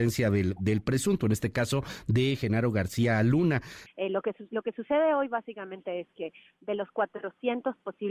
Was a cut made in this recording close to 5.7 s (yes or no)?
no